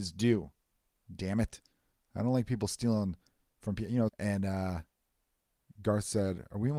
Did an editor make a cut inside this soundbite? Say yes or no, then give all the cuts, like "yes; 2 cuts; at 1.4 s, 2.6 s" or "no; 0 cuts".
yes; 1 cut; at 4.1 s